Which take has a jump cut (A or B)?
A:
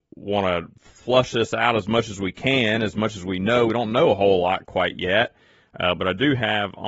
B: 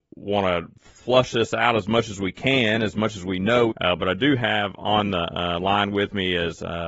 B